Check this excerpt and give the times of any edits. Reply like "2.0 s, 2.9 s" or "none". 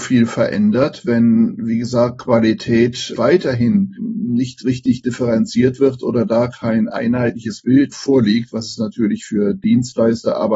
3.2 s